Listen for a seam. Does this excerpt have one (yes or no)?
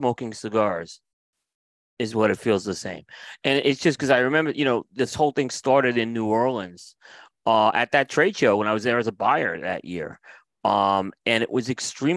no